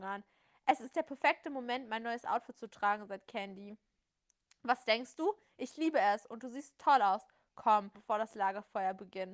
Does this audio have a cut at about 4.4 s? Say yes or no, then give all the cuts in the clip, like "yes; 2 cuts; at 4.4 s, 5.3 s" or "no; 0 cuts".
no; 1 cut; at 7.9 s